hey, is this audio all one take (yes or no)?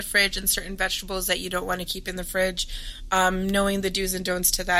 yes